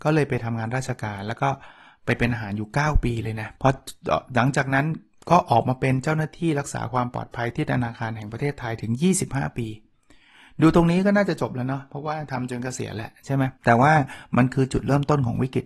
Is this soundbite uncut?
no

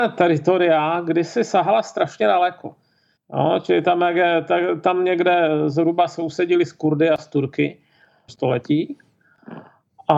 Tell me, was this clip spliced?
yes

